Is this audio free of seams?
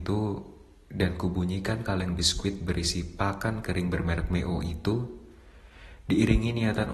yes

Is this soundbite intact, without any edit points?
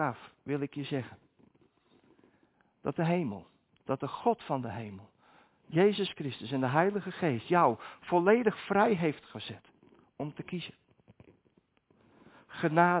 yes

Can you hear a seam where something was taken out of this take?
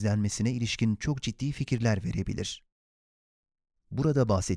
no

